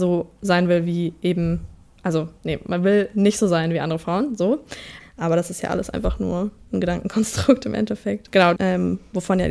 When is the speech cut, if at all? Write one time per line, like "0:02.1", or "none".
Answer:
0:05.0
0:08.6

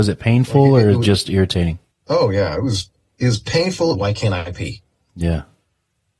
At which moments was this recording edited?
0:01.9
0:03.9

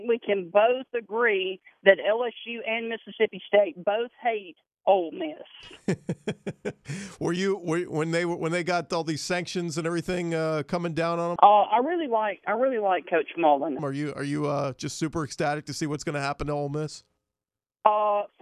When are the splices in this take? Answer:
0:11.4
0:13.8

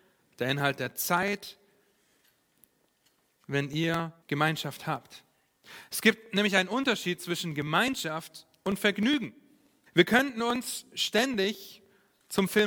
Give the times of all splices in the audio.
0:04.2
0:09.9

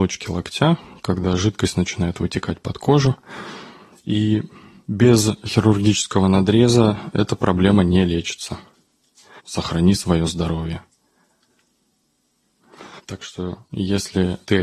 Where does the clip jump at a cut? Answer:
0:09.4
0:13.0

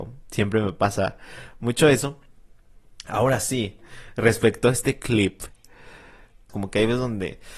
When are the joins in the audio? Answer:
0:06.5

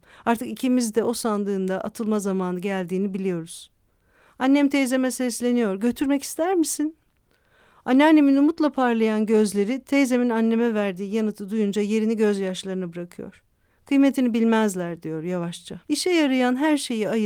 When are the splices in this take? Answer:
0:15.8

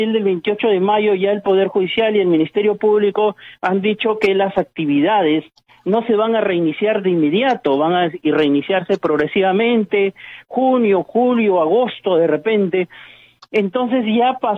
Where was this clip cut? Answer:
none

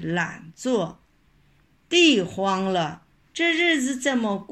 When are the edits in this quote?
0:03.2

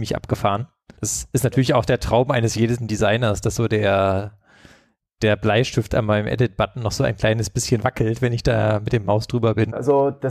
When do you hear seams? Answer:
0:00.9

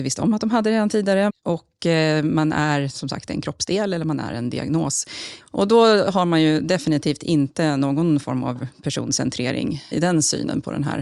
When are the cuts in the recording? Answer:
0:01.3
0:05.4
0:09.9

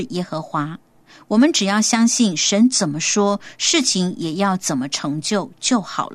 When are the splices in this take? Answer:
none

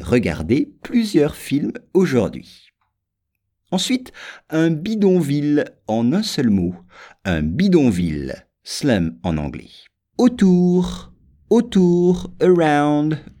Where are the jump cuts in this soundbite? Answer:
0:10.1

